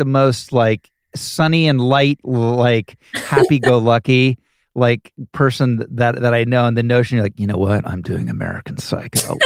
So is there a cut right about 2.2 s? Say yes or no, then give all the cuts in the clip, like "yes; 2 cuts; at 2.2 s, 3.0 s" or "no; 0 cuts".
yes; 1 cut; at 2.2 s